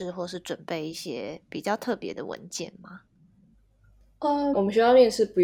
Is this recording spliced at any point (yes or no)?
yes